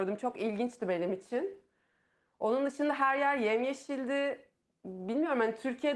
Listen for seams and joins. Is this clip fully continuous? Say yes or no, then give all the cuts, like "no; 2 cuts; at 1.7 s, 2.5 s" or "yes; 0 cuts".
yes; 0 cuts